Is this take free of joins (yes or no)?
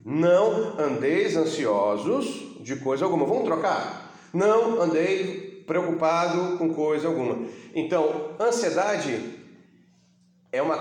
yes